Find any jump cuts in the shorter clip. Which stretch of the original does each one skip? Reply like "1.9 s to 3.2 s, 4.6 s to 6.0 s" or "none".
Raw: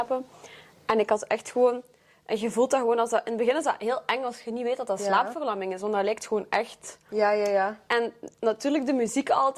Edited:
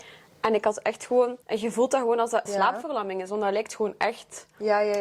1.9 s to 2.2 s, 3.2 s to 5.0 s